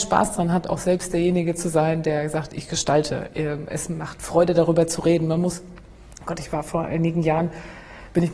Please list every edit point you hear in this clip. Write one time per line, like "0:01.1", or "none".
none

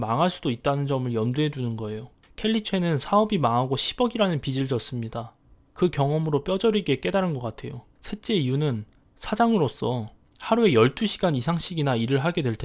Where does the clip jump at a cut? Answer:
none

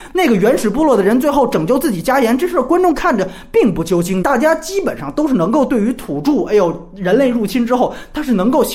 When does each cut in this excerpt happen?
0:04.2

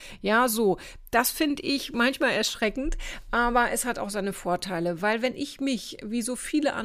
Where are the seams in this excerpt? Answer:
none

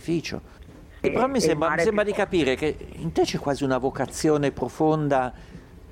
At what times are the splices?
0:01.0

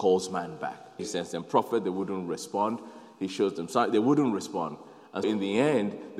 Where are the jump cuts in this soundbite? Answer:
0:01.0
0:05.2

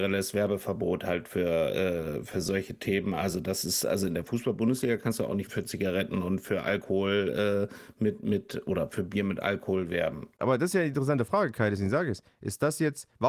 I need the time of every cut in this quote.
0:05.5

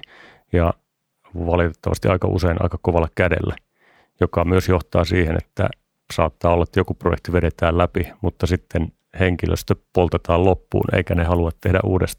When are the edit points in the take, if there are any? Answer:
none

